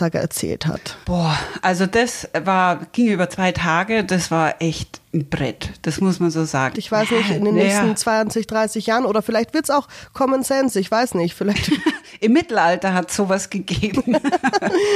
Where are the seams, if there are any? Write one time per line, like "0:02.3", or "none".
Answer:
0:01.0
0:06.7